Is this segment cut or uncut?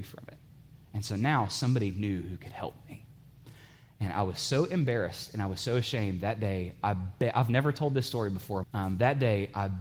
cut